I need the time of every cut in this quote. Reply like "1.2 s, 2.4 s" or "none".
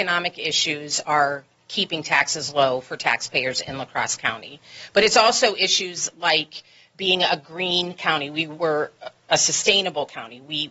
none